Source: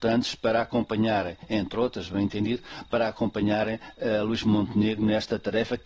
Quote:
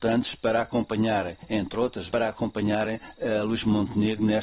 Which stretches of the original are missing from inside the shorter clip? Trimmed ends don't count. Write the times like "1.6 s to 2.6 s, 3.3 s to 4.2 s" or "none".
2.1 s to 2.9 s